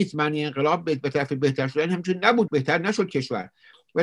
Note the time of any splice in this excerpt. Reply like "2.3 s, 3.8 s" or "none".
2.5 s